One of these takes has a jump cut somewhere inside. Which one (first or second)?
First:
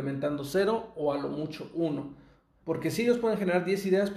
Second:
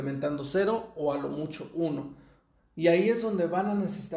first